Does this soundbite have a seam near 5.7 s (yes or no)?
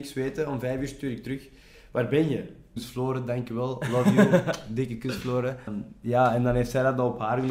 yes